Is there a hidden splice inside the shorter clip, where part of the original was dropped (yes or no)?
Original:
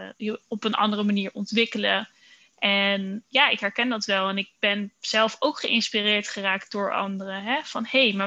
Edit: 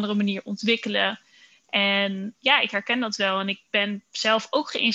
no